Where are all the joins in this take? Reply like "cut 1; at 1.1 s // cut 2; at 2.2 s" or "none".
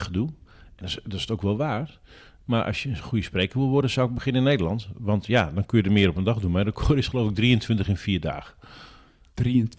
none